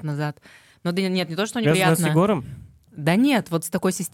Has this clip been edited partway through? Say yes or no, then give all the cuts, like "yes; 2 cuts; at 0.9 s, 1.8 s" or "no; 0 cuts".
yes; 1 cut; at 1.6 s